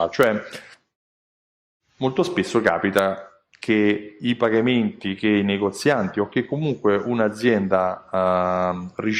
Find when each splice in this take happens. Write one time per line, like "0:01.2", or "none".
none

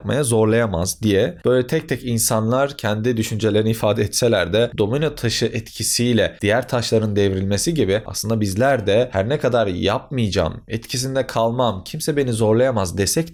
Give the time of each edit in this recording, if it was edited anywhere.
0:10.7

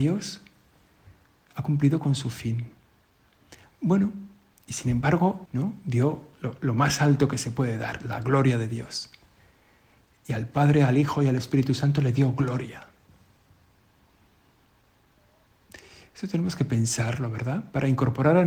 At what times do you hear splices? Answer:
0:03.7
0:05.4

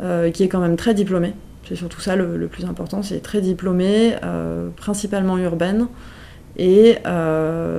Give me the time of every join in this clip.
none

